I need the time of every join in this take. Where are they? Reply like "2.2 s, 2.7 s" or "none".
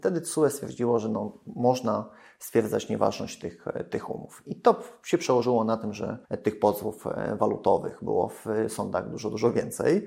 6.2 s